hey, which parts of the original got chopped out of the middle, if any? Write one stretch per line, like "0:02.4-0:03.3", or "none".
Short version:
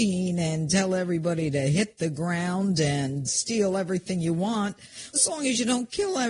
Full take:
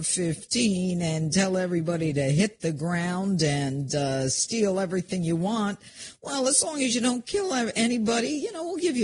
0:03.9-0:04.3
0:06.2-0:06.5